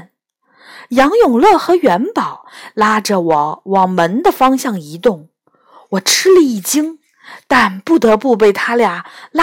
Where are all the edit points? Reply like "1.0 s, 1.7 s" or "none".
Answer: none